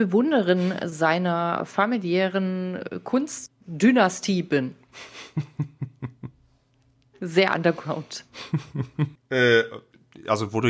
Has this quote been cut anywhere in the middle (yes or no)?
yes